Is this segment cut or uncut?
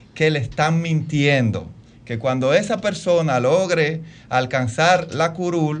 uncut